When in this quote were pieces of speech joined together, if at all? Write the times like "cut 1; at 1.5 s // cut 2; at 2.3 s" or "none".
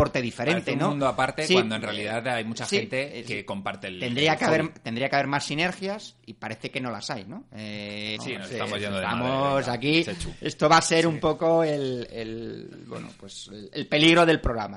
cut 1; at 8.2 s